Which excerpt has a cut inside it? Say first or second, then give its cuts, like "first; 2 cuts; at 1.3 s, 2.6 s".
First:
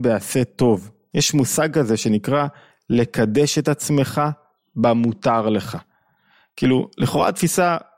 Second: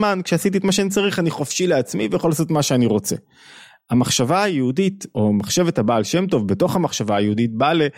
first; 1 cut; at 1.1 s